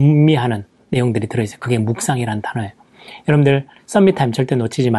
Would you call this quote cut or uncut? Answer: cut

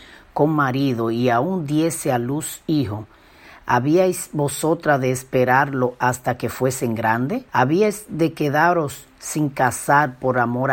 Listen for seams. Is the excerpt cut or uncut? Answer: cut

